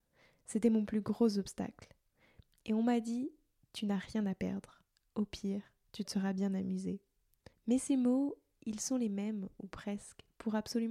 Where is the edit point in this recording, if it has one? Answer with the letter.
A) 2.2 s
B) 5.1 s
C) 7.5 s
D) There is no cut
C